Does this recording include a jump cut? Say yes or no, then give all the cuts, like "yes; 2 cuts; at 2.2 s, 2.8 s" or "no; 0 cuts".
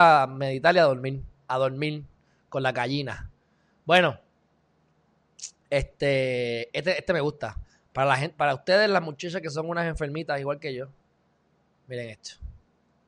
no; 0 cuts